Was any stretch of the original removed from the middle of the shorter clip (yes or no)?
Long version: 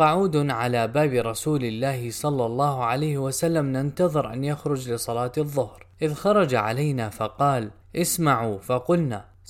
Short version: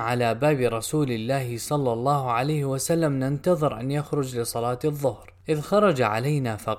no